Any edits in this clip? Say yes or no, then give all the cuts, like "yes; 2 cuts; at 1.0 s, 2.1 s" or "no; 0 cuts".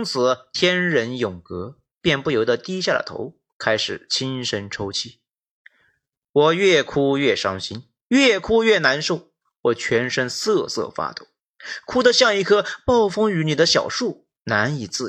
no; 0 cuts